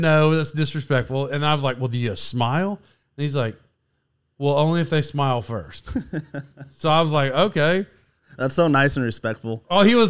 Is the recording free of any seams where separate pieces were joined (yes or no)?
yes